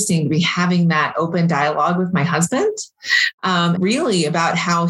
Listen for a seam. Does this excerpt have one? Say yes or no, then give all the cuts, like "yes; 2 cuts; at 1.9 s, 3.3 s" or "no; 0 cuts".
yes; 1 cut; at 3.8 s